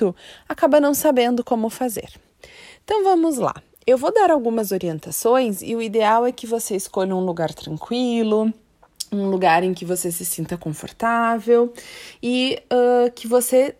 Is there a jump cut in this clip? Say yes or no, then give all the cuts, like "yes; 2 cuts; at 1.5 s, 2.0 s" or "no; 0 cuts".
no; 0 cuts